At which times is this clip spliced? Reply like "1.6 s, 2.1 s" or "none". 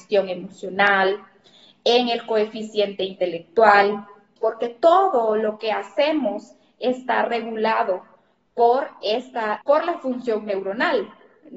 4.4 s, 9.6 s